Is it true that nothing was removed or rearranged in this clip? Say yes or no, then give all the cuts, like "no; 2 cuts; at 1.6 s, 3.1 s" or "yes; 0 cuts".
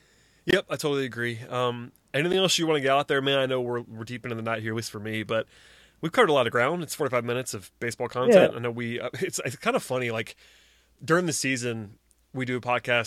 yes; 0 cuts